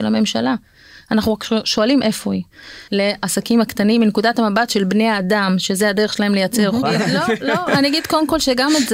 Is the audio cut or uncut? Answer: cut